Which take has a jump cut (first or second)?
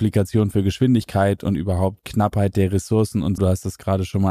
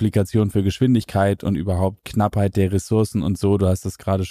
first